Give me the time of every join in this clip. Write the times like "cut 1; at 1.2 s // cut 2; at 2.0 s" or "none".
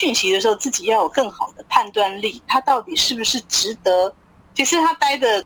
cut 1; at 2.5 s // cut 2; at 4.5 s